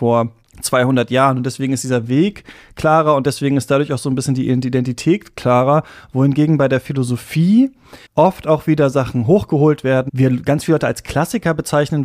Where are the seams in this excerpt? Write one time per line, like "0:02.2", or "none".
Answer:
0:08.1
0:10.1